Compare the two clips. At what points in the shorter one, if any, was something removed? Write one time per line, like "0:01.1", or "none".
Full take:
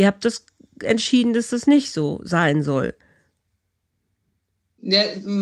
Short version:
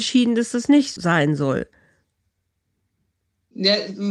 0:01.0